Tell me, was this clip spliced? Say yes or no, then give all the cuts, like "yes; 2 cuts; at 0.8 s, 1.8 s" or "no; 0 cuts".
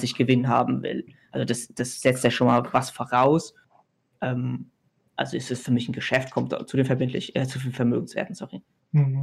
no; 0 cuts